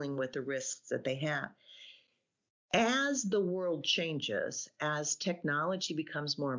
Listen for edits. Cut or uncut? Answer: uncut